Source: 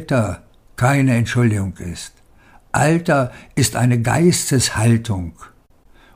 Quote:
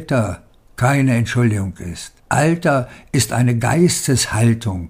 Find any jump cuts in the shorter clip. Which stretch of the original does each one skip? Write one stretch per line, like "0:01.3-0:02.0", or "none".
0:02.2-0:02.6